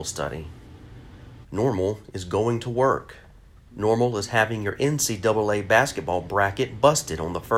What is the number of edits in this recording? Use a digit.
2